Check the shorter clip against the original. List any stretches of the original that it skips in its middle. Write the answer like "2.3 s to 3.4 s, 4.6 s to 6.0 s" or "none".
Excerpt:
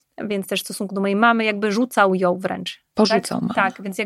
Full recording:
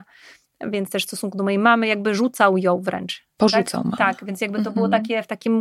none